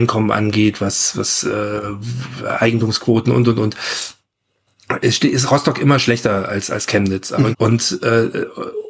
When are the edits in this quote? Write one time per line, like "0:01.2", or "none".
0:07.5